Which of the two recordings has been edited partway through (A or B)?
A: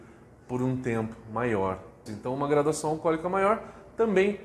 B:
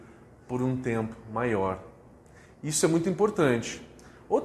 A